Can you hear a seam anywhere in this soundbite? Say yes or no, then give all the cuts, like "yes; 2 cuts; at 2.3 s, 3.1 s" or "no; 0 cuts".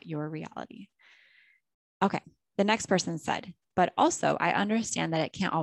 yes; 1 cut; at 3.6 s